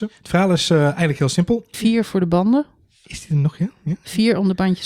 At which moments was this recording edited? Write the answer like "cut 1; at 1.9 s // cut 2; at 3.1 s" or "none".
cut 1; at 1.7 s

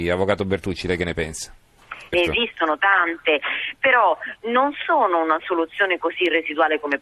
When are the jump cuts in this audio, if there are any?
cut 1; at 2.1 s

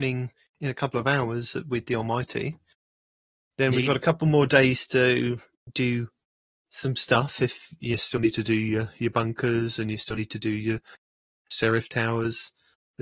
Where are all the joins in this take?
none

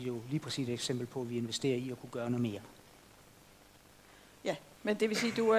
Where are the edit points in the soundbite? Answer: none

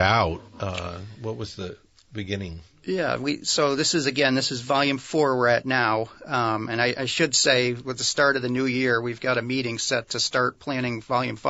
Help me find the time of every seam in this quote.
none

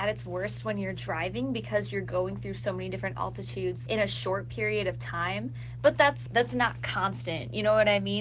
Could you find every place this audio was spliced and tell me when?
cut 1; at 3.9 s // cut 2; at 6.3 s

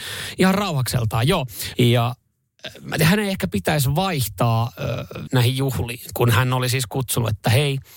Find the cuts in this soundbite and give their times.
cut 1; at 1.7 s // cut 2; at 5.3 s

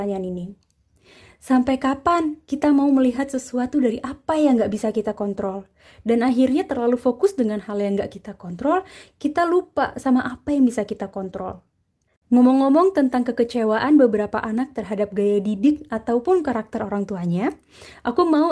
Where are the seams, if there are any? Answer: cut 1; at 12.1 s

